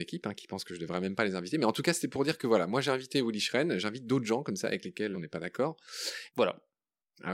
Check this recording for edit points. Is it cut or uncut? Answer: cut